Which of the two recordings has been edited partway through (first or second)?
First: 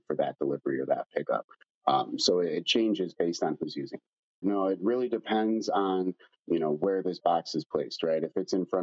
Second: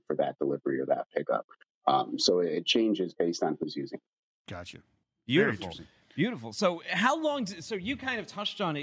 first